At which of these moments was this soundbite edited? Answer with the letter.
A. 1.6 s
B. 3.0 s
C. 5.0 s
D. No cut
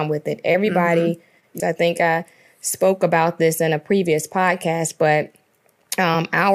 A